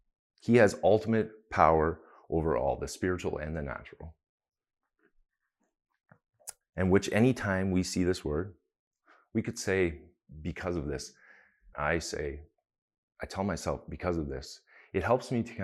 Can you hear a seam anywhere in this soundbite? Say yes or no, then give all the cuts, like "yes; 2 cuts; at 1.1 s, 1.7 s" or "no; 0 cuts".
yes; 2 cuts; at 6.6 s, 11.7 s